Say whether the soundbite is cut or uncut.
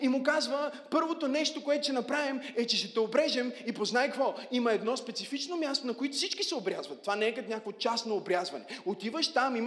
uncut